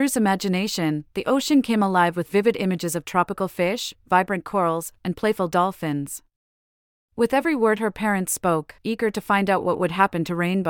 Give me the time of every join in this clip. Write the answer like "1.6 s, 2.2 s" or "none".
6.9 s, 8.8 s